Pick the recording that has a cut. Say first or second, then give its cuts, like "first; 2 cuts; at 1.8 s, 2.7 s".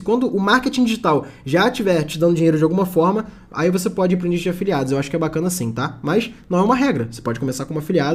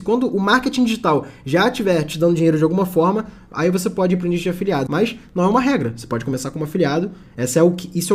second; 1 cut; at 4.9 s